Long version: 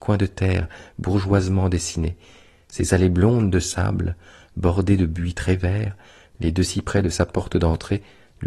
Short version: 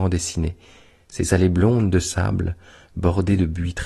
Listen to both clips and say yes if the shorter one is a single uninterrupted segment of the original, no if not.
yes